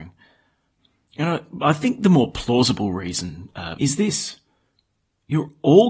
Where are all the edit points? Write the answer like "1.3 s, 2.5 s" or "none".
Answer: 3.8 s